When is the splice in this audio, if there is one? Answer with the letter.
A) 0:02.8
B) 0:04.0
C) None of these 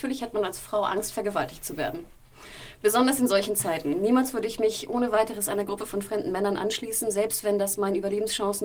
C